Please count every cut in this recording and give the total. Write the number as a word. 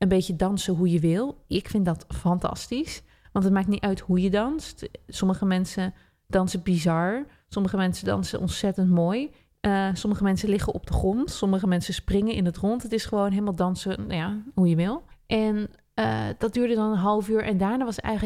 zero